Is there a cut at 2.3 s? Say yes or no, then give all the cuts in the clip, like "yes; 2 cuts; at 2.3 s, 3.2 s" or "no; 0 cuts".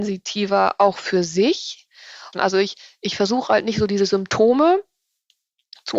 yes; 1 cut; at 2.3 s